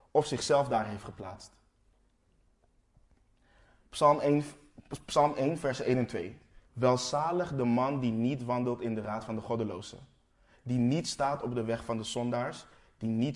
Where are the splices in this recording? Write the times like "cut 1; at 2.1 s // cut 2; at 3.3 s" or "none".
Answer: cut 1; at 6.7 s